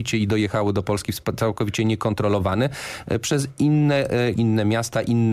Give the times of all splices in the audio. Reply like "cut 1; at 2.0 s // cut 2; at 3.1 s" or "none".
cut 1; at 4.4 s